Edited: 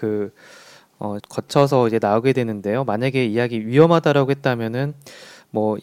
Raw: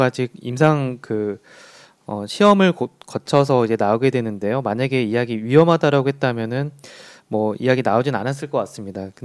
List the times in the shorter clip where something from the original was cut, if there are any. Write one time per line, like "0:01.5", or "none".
0:01.2